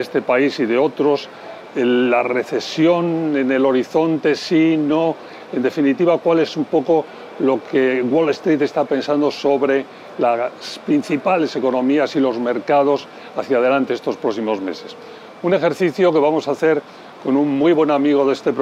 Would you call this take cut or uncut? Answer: uncut